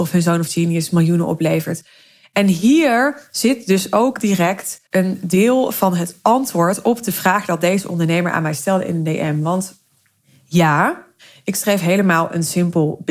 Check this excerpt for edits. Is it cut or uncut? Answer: cut